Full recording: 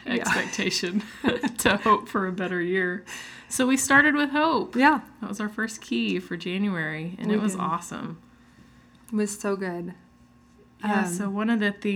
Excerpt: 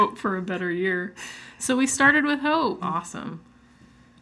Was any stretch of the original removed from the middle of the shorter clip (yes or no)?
yes